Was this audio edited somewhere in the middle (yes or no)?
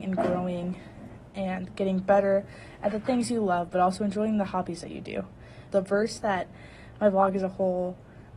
yes